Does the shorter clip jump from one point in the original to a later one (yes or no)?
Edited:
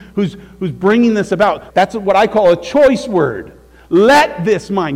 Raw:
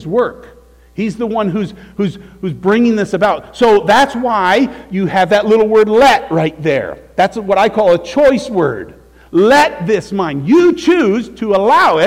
yes